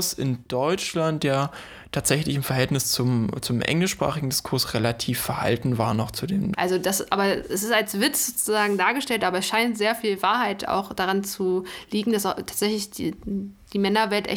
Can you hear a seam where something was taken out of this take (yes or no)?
yes